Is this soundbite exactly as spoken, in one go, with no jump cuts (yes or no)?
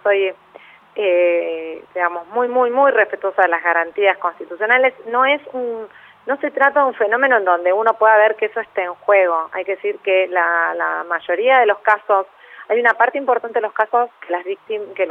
yes